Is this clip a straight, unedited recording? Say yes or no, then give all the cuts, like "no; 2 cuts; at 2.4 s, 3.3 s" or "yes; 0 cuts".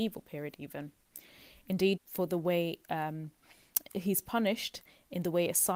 no; 1 cut; at 2.0 s